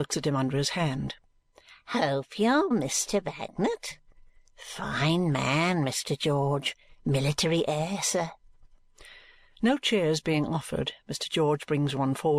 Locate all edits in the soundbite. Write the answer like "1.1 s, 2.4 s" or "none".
2.7 s